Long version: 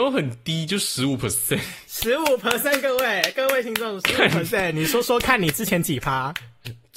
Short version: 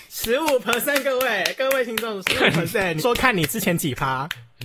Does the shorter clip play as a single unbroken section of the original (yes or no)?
no